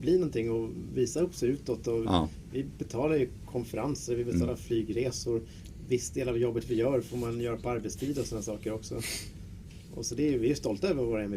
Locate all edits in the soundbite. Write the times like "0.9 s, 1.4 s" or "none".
none